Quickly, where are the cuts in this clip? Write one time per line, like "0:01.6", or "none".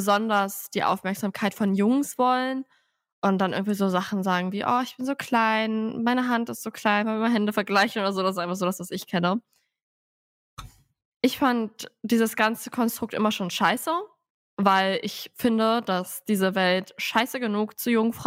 none